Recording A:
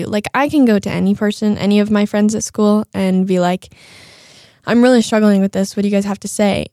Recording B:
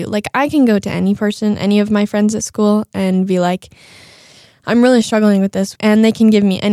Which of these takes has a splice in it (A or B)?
B